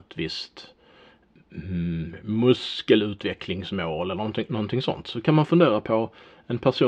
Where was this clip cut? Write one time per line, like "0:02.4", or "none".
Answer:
none